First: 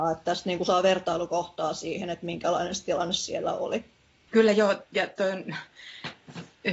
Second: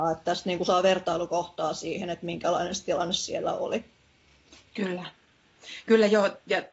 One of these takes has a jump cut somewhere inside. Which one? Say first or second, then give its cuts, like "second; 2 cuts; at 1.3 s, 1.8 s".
first; 1 cut; at 4.3 s